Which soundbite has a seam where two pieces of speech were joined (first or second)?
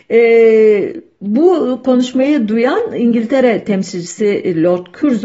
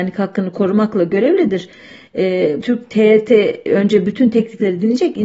second